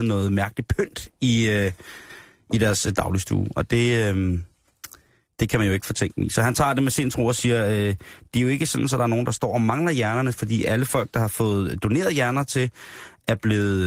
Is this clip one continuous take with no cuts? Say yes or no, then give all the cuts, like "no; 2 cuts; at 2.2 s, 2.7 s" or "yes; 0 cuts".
yes; 0 cuts